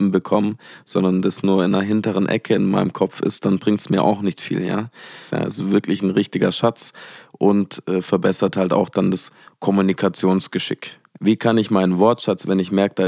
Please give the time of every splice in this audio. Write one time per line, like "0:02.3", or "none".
0:05.3